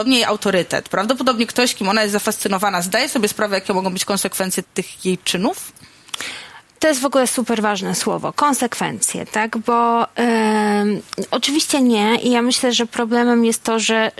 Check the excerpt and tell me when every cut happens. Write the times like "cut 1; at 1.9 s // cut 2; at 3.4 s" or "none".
cut 1; at 4.6 s